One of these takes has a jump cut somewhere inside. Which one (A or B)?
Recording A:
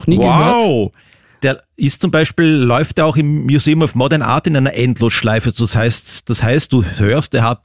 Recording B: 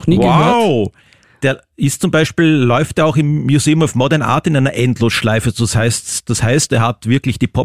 B